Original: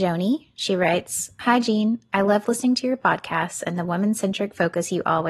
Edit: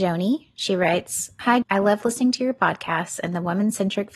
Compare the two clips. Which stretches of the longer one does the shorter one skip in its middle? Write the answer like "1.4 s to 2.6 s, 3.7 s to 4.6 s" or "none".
1.6 s to 2.1 s